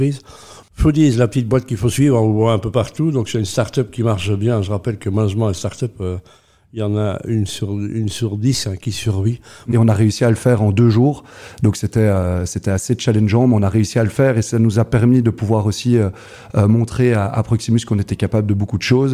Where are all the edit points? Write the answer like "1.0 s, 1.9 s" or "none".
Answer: 9.7 s